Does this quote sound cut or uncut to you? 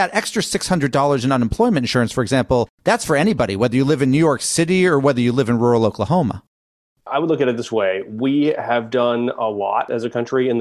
uncut